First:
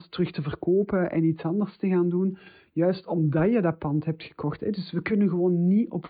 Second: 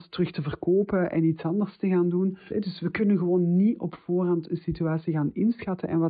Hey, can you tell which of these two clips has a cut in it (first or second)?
second